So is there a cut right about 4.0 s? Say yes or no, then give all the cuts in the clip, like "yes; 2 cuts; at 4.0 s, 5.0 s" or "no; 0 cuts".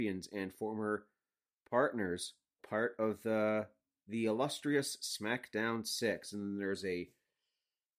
no; 1 cut; at 2.6 s